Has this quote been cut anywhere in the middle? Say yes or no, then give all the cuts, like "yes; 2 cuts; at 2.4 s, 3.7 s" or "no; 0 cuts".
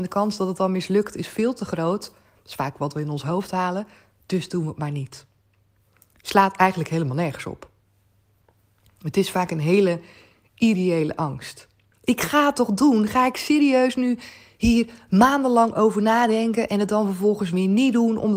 yes; 1 cut; at 11.9 s